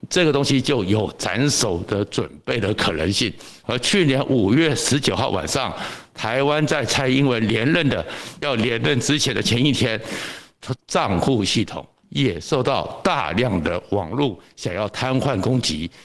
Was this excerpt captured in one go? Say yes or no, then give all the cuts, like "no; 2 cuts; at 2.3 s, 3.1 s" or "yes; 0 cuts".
no; 2 cuts; at 3.6 s, 10.8 s